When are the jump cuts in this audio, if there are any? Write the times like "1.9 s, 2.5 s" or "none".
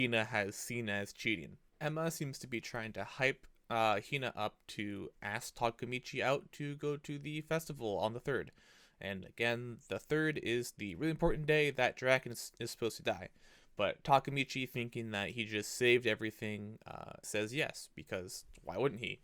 17.2 s